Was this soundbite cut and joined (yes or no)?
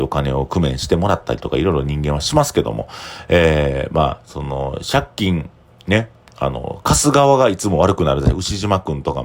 no